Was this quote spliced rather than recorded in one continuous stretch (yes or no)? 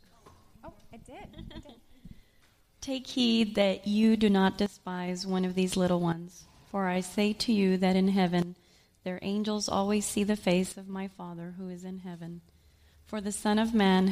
no